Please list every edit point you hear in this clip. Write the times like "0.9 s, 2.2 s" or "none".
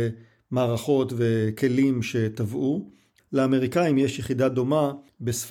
3.2 s